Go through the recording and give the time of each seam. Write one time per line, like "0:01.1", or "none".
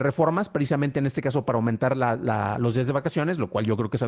none